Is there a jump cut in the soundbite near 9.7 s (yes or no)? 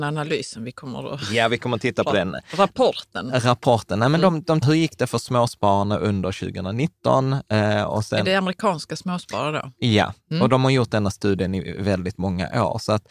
no